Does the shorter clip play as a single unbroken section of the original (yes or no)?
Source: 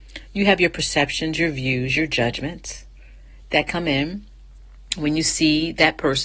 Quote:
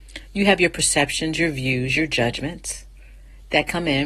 yes